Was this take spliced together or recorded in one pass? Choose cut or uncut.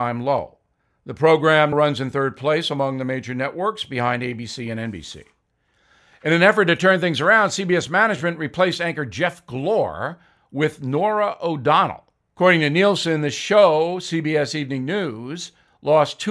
cut